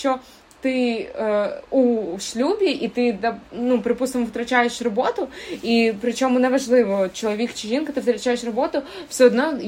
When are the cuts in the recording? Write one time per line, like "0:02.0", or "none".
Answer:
none